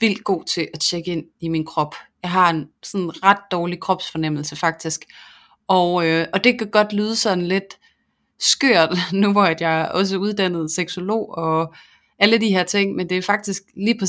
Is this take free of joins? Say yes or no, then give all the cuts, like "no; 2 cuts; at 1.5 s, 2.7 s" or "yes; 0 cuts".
yes; 0 cuts